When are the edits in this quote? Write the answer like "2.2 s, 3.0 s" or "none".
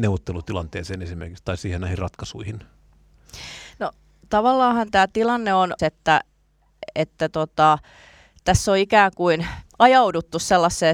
5.8 s